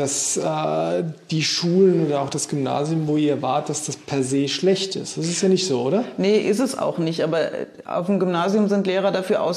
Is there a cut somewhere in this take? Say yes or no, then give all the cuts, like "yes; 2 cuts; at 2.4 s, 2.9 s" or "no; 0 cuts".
no; 0 cuts